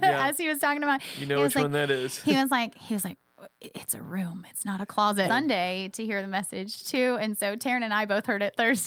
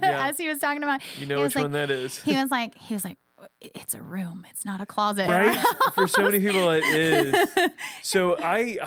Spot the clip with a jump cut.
first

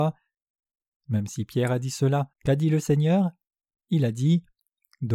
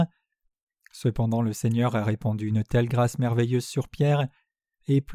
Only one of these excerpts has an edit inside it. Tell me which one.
first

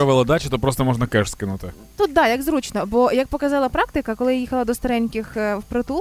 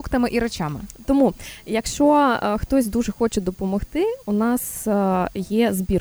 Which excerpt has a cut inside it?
second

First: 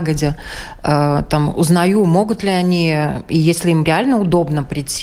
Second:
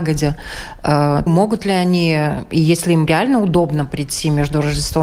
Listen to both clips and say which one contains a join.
second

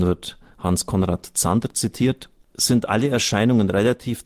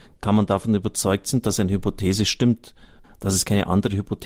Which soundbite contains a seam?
second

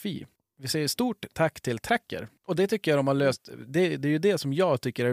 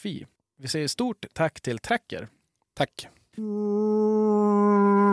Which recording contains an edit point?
first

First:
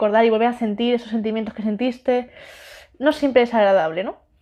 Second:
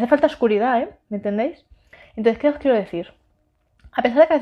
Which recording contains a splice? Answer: second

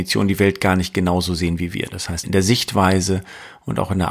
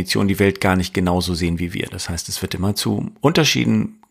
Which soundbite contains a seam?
first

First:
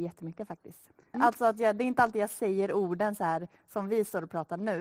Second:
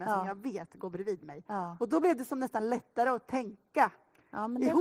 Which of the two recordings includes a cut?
first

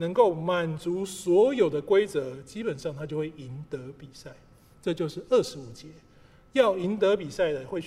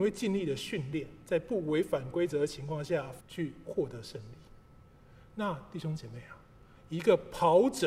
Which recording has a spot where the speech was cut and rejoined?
second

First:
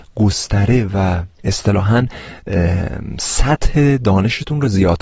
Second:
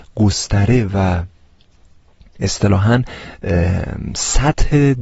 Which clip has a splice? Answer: first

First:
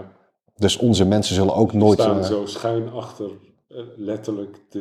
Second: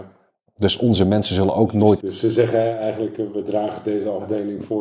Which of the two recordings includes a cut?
second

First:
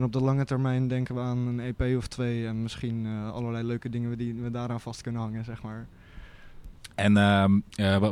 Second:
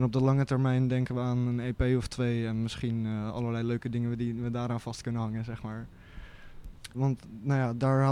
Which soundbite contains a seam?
second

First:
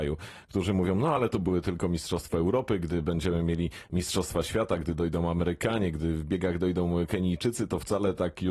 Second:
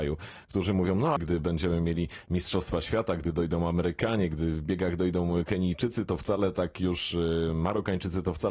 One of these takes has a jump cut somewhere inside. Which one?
second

